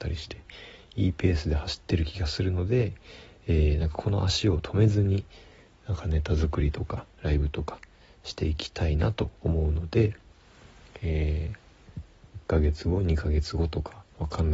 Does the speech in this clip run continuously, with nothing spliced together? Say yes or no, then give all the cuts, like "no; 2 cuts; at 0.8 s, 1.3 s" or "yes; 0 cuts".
yes; 0 cuts